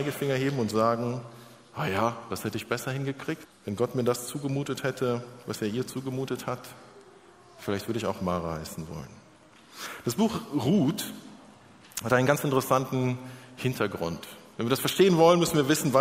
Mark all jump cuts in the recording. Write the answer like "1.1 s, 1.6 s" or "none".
3.4 s